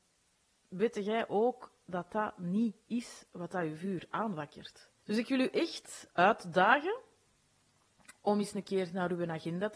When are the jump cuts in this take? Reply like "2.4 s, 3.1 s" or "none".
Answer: 5.0 s